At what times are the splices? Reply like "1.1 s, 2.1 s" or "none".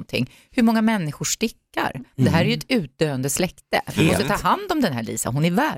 none